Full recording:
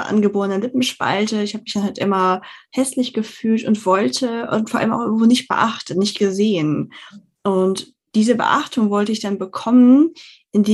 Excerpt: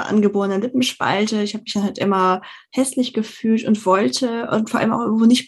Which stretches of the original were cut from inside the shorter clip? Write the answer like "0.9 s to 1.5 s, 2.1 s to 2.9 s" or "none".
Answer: none